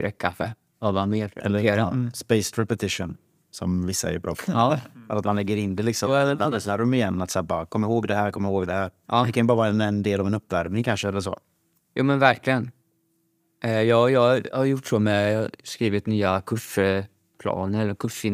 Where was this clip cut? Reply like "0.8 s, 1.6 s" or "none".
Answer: none